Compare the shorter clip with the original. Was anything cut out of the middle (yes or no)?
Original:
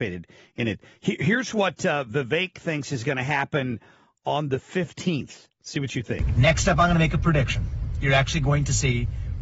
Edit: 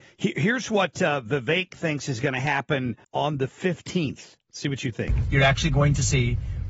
yes